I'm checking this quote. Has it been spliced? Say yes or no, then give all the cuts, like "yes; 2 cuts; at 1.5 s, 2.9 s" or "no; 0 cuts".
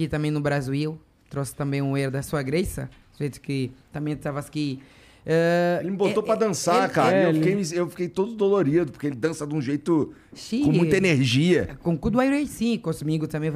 no; 0 cuts